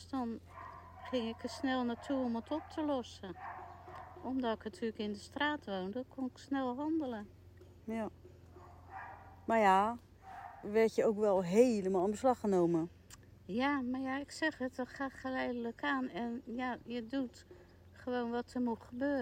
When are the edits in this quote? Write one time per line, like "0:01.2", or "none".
0:10.6